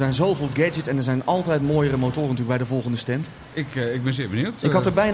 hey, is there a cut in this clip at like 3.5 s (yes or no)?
yes